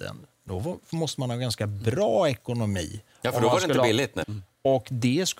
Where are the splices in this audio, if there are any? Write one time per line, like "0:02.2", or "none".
0:04.2